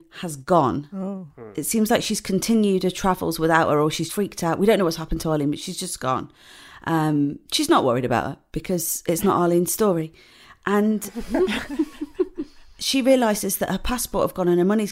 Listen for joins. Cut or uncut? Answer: cut